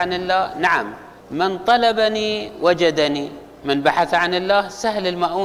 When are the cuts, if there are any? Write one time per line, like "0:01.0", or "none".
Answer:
0:01.2